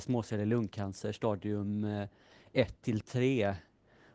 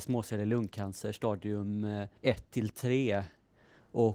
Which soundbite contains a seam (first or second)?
second